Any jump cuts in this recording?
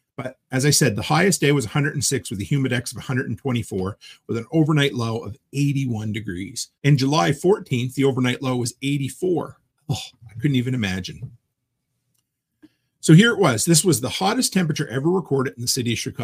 yes; 1 cut; at 6.8 s

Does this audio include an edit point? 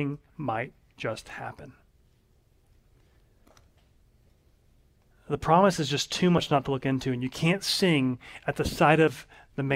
no; 0 cuts

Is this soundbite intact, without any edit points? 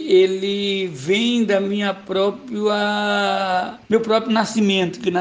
no; 1 cut; at 3.8 s

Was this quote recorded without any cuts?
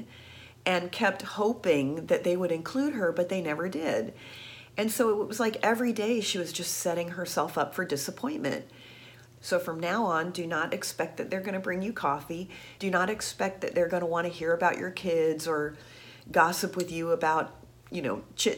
no; 2 cuts; at 9.4 s, 12.8 s

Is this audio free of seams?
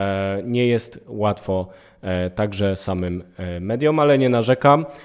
yes; 0 cuts

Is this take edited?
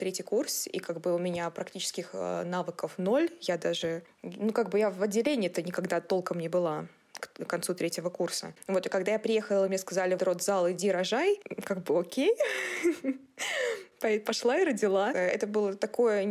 yes; 1 cut; at 10.2 s

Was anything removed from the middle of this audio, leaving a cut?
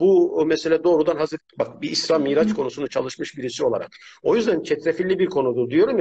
yes; 1 cut; at 1.4 s

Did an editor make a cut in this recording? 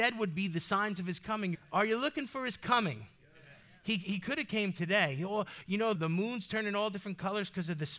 yes; 2 cuts; at 1.5 s, 5.9 s

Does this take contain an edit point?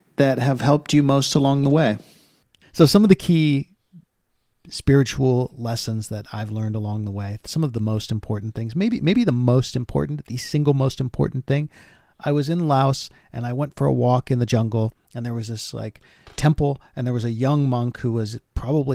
yes; 1 cut; at 2.6 s

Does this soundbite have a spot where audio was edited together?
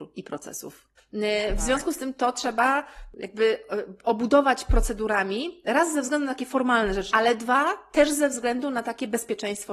yes; 2 cuts; at 1.0 s, 7.1 s

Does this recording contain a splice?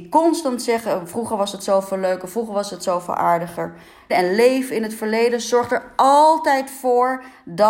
yes; 1 cut; at 4.1 s

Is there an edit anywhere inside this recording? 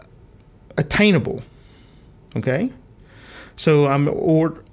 yes; 1 cut; at 2.1 s

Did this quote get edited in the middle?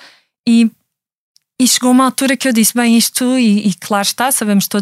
no; 0 cuts

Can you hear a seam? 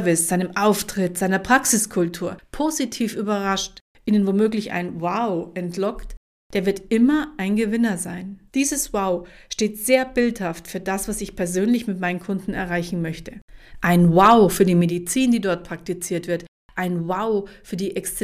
yes; 1 cut; at 8.5 s

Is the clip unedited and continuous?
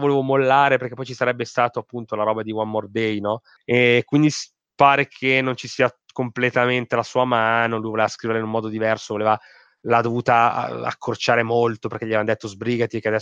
no; 1 cut; at 3.6 s

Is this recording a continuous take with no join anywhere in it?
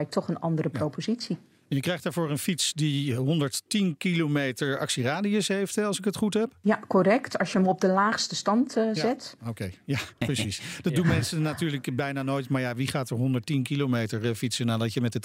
yes; 0 cuts

